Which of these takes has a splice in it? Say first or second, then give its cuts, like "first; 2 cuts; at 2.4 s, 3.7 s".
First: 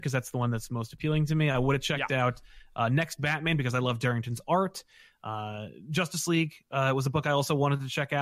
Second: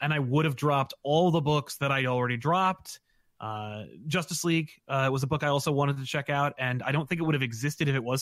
first; 1 cut; at 5.2 s